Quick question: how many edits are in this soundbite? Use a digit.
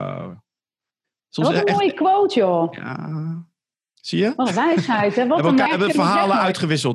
1